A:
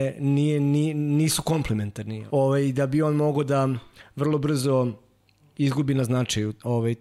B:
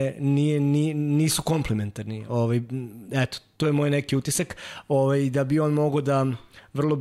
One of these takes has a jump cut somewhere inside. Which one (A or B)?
A